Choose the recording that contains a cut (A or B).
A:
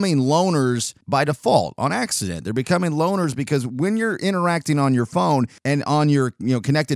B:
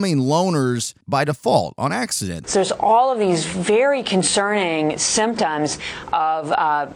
B